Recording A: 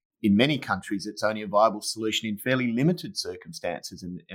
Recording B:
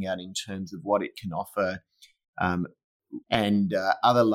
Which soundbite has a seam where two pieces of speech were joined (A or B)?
B